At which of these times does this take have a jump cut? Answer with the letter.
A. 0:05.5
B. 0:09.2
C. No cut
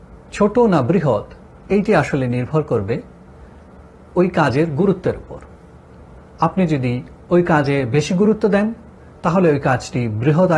C